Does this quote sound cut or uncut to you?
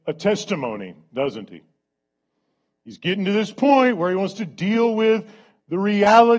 uncut